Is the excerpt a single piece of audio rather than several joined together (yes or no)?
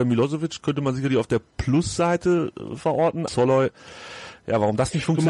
no